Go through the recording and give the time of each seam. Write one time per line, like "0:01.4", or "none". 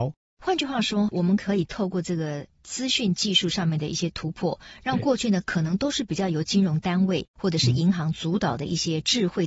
0:01.1